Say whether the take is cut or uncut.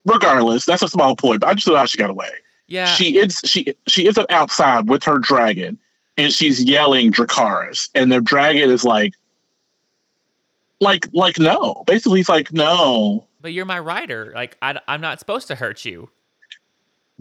uncut